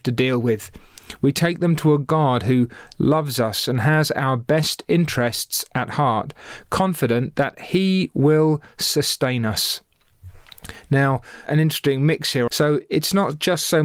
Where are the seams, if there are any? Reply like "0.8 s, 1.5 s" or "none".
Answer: 11.5 s, 12.5 s